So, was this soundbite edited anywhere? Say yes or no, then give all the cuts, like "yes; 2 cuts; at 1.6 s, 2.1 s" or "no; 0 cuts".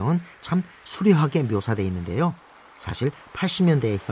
no; 0 cuts